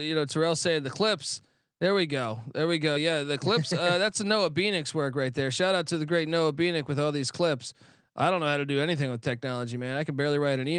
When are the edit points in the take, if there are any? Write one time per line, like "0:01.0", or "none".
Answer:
none